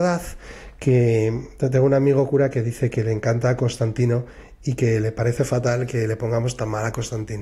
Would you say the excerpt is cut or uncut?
uncut